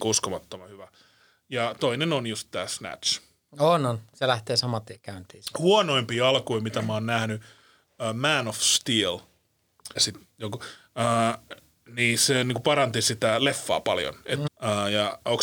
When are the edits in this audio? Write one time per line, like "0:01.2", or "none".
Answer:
0:10.0
0:14.4